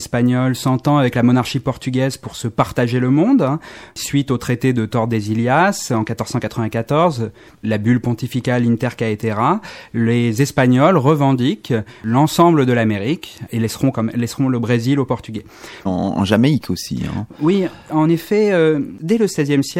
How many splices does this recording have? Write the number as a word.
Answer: two